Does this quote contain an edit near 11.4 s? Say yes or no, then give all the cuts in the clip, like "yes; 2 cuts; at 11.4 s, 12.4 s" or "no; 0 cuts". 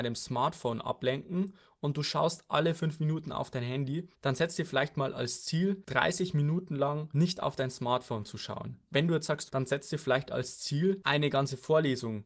no; 2 cuts; at 4.1 s, 9.5 s